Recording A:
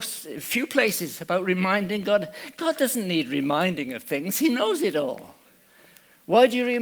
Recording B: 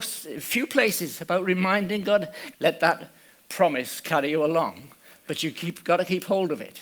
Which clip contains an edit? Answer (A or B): B